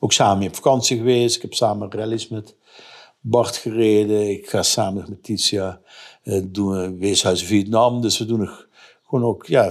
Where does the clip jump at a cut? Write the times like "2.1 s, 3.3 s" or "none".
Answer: none